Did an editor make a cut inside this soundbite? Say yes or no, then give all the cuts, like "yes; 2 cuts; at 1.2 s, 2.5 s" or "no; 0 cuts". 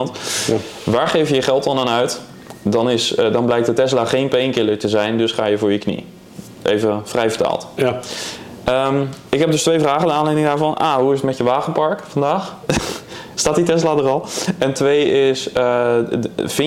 no; 0 cuts